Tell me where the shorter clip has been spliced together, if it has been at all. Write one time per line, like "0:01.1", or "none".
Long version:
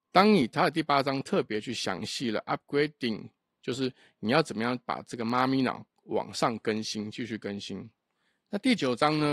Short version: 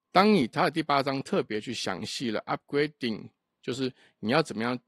none